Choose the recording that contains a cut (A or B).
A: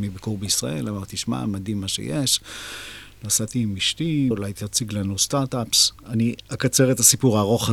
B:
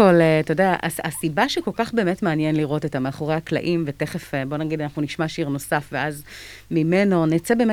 A